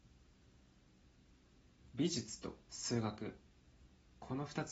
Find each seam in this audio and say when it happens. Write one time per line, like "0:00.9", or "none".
0:02.6